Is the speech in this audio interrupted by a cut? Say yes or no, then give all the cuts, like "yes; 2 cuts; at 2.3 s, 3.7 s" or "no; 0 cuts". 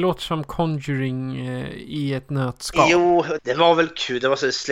yes; 1 cut; at 3.4 s